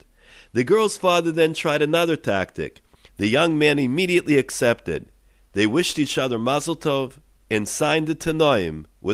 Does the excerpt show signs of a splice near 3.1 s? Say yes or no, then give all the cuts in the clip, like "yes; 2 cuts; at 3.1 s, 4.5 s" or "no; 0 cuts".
yes; 2 cuts; at 3.1 s, 7.4 s